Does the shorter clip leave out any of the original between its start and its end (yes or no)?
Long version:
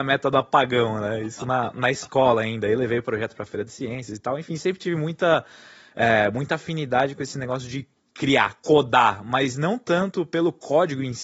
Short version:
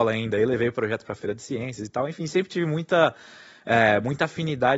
no